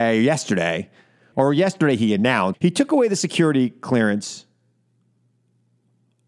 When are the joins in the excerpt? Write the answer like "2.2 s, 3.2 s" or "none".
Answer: 1.3 s, 2.5 s